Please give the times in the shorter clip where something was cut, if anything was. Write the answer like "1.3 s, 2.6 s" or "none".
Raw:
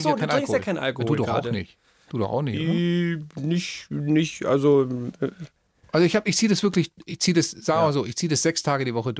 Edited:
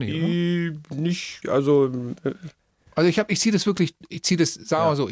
1.4 s